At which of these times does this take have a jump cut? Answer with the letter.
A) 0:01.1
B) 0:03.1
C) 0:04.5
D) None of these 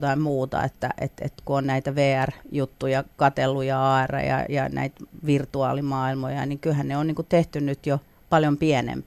B